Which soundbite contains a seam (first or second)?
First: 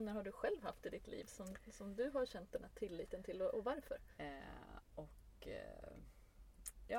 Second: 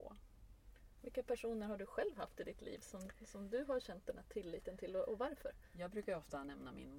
first